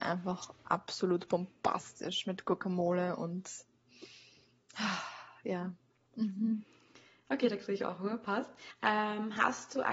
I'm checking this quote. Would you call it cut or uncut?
cut